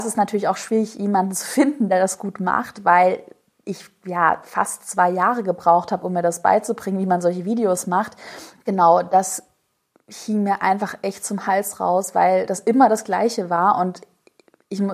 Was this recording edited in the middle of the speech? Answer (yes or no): yes